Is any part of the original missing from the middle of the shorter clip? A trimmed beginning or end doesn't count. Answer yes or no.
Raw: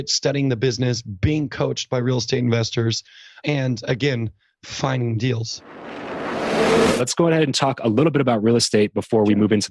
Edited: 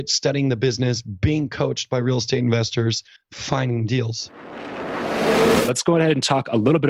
yes